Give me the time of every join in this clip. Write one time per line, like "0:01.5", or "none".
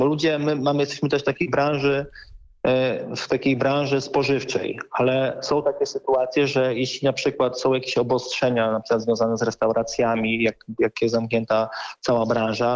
none